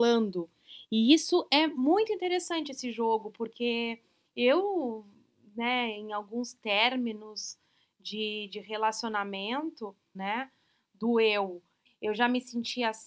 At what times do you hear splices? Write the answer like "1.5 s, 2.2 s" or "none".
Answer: 10.1 s, 11.9 s